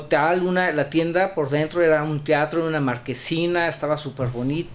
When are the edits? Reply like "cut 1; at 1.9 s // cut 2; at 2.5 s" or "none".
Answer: none